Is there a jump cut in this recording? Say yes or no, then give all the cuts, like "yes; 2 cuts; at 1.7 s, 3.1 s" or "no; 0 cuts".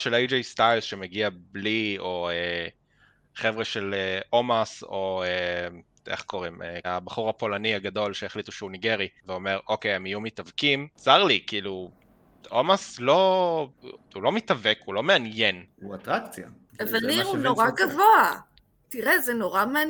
yes; 3 cuts; at 6.8 s, 9.2 s, 14.0 s